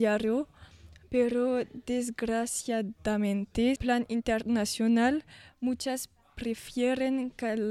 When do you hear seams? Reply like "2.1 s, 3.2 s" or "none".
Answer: 3.8 s

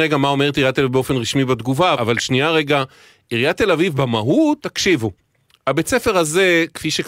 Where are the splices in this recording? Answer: 1.9 s, 4.6 s

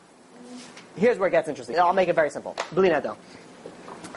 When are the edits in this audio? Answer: 1.7 s

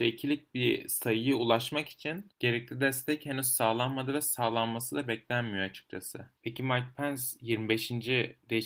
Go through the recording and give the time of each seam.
none

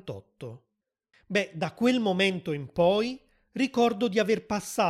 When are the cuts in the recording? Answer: 1.1 s

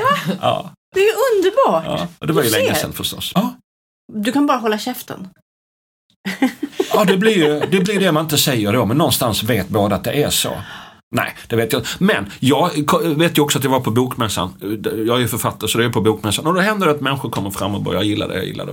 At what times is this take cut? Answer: 3.3 s

